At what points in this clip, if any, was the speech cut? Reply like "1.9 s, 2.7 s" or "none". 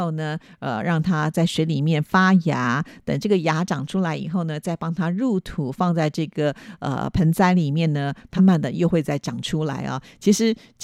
8.4 s